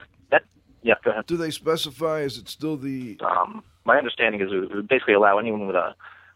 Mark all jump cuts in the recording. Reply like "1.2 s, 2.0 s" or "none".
3.2 s